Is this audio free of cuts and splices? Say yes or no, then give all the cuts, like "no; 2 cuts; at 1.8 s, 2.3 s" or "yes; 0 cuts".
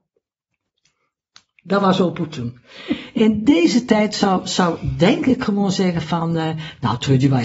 yes; 0 cuts